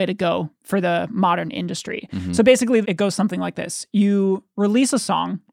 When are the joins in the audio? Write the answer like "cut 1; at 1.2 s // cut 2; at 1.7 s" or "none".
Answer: cut 1; at 2.8 s